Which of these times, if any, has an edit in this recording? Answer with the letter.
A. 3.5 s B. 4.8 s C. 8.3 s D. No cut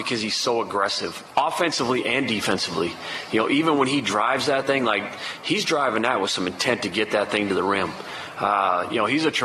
D